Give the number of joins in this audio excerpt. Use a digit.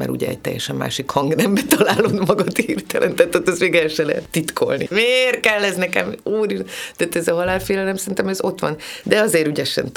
2